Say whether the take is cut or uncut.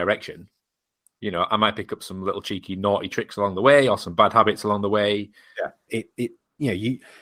cut